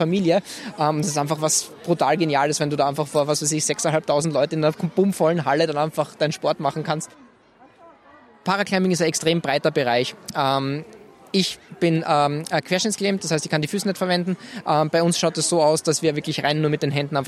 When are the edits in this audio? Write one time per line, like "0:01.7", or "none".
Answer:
none